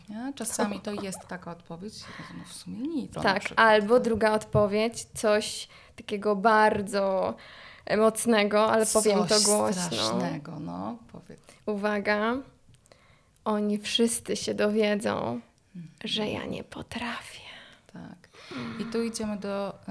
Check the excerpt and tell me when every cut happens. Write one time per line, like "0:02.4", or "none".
0:03.1